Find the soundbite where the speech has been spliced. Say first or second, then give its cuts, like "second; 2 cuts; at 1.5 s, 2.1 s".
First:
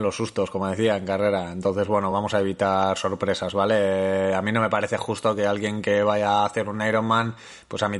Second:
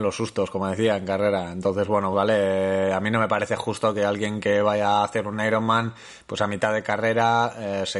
second; 1 cut; at 2.1 s